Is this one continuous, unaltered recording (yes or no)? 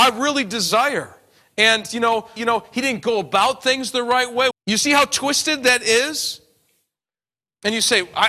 no